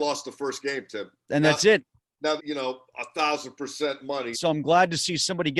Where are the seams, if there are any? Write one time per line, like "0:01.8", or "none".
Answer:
0:02.4
0:04.3